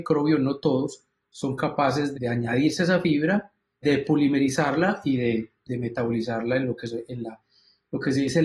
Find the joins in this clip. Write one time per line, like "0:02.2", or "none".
0:02.1
0:03.8